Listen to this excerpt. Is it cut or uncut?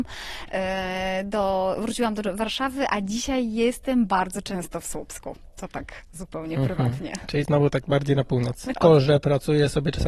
cut